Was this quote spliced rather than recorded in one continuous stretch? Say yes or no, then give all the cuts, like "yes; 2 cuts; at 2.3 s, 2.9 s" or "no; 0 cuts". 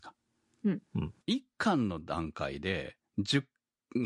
yes; 1 cut; at 1.2 s